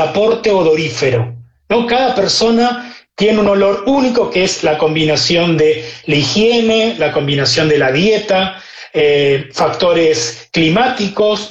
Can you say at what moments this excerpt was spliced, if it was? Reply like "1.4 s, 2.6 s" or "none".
none